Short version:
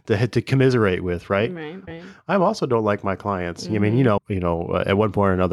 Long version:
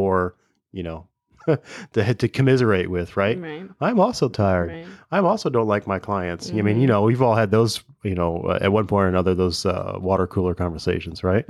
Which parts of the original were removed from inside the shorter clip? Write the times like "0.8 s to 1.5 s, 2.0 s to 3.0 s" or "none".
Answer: 3.7 s to 4.7 s, 7.0 s to 7.9 s